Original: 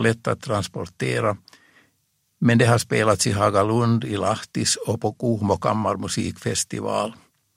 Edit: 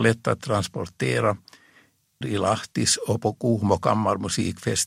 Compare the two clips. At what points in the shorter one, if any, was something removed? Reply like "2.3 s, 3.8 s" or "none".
2.2 s